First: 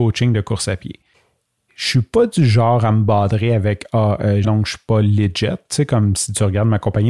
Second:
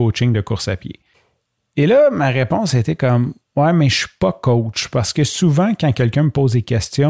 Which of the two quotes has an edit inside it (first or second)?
first